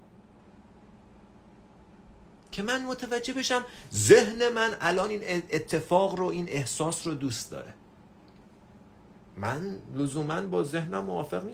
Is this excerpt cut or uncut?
uncut